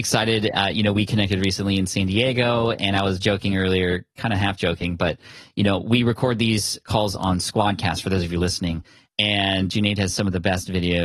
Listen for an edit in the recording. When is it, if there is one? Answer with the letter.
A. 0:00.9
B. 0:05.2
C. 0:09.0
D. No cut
C